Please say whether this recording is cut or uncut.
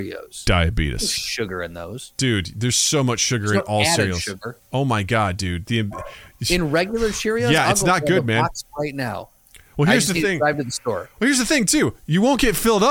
uncut